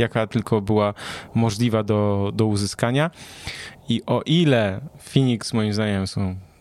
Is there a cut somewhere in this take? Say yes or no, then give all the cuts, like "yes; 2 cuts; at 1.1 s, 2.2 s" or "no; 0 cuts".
no; 0 cuts